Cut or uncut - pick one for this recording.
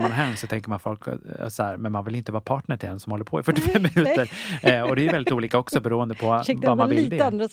uncut